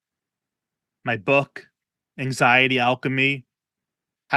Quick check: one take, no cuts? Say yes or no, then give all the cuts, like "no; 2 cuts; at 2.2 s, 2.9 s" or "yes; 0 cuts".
yes; 0 cuts